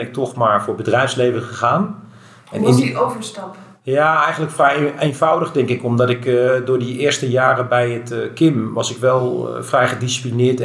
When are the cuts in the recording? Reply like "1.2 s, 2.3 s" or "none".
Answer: none